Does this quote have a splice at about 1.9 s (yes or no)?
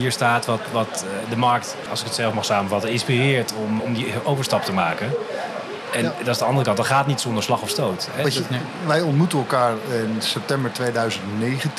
yes